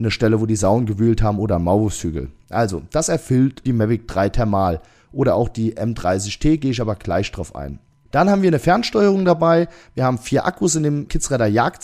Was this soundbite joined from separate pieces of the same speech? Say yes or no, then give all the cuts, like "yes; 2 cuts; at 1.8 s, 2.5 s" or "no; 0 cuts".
no; 0 cuts